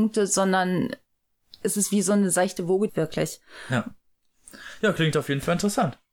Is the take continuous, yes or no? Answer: no